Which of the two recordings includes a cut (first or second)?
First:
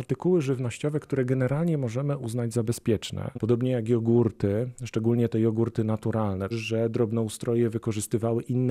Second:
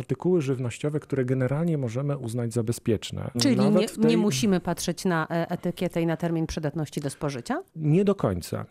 first